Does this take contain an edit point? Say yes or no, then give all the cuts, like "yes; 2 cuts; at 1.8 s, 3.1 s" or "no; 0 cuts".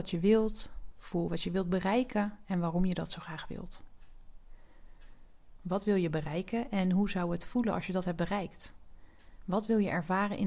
yes; 2 cuts; at 0.9 s, 5.6 s